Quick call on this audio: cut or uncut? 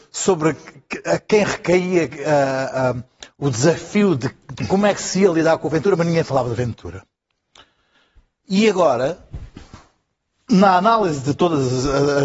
uncut